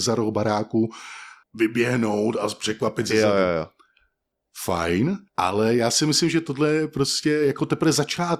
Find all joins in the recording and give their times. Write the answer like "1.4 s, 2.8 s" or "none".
1.4 s, 5.3 s